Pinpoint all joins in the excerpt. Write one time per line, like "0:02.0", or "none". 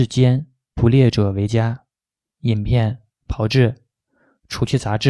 0:02.3